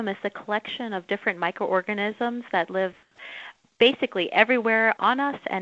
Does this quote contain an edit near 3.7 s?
no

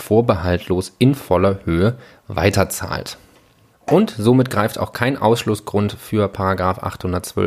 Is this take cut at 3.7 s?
yes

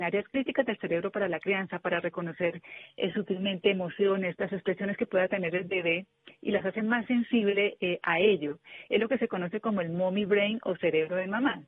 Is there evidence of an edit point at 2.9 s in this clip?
no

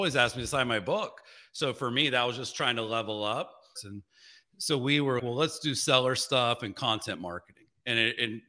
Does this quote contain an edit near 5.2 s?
yes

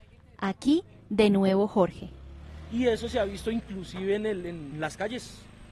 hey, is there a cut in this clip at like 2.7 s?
no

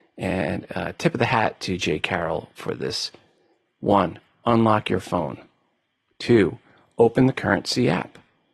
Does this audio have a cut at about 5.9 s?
no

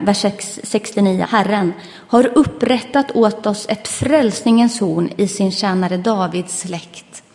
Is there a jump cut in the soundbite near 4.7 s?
no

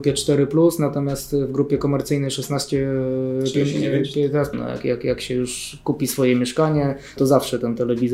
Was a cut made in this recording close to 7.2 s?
yes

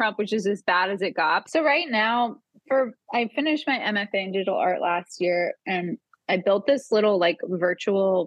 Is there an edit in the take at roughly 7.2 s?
no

